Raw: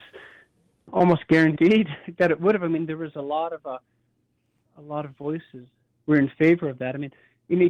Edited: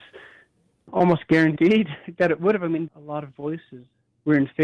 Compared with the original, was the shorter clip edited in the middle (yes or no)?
yes